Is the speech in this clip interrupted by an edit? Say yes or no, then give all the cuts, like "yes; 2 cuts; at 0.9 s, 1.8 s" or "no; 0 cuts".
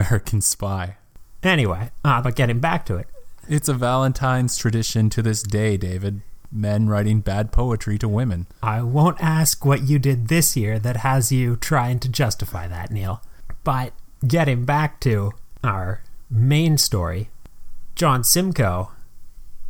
yes; 1 cut; at 2.2 s